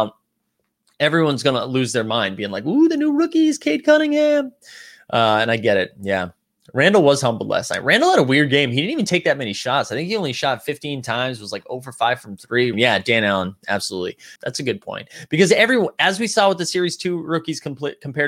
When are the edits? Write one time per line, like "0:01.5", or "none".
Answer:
0:12.7
0:14.4